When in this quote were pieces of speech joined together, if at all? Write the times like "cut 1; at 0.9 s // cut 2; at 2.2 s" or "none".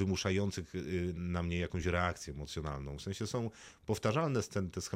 cut 1; at 1.2 s